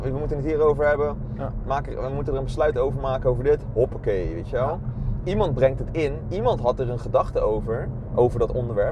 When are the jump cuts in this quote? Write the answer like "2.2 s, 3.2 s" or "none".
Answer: none